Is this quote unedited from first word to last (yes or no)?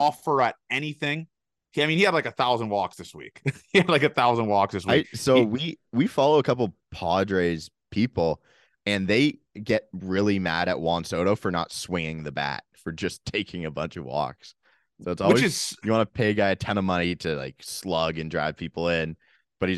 no